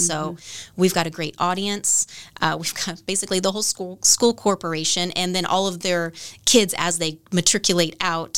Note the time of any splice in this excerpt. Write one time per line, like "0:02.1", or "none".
none